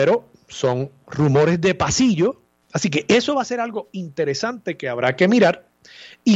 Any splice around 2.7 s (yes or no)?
yes